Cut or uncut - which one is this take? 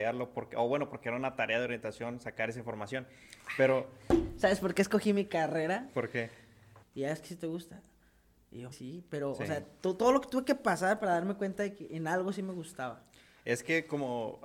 cut